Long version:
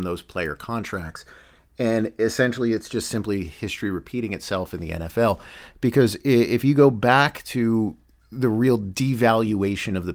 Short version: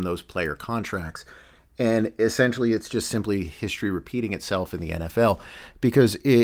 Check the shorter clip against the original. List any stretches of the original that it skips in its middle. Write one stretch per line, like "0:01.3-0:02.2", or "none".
none